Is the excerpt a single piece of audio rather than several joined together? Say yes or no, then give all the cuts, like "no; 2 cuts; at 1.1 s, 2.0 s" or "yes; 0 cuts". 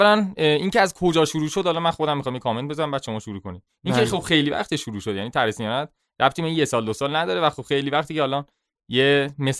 yes; 0 cuts